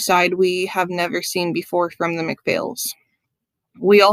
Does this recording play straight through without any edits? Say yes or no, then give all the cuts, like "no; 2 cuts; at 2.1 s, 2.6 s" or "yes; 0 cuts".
yes; 0 cuts